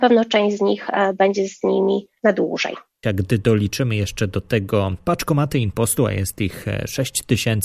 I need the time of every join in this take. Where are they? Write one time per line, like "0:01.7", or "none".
0:03.0